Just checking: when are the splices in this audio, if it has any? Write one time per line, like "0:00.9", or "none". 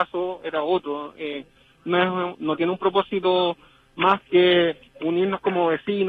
none

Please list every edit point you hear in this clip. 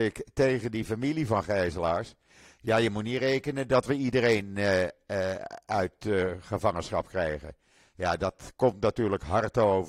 none

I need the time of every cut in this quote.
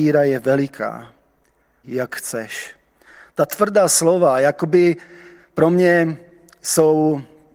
0:01.8

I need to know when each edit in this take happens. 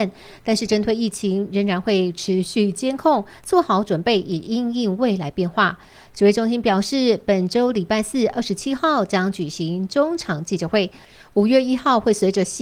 none

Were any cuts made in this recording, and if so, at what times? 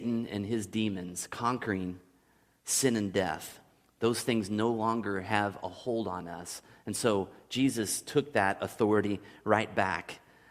none

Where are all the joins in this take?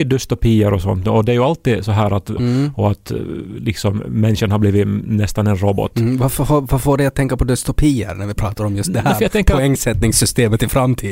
0:02.4

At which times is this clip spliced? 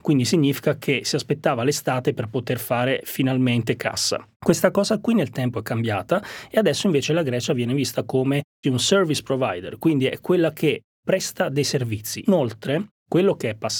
0:04.3
0:08.6
0:12.2

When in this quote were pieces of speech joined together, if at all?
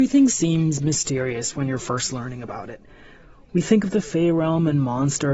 none

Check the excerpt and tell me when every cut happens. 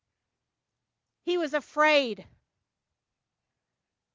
none

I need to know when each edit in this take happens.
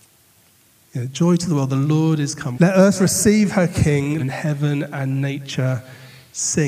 0:02.5
0:04.2

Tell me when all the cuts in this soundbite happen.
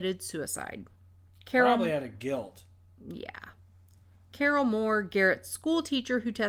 none

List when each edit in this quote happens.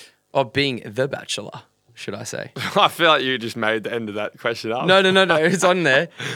none

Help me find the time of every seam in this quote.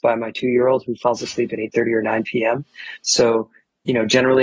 none

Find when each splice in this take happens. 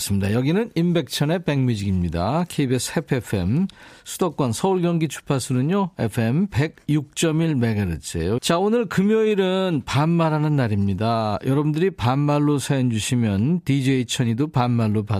0:08.4

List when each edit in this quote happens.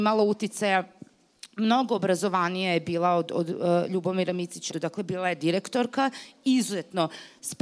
0:04.7

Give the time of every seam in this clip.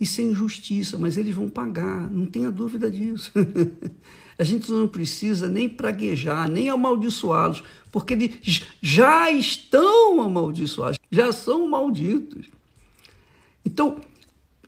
0:10.9

